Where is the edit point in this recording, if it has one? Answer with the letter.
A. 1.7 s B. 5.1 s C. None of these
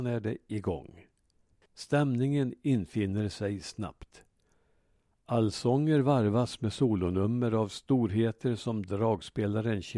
A